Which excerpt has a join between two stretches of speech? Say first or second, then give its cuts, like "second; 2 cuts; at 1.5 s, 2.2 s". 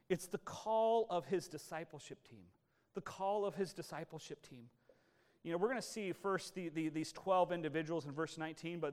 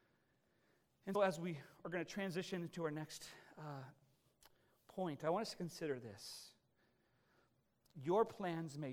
second; 1 cut; at 1.1 s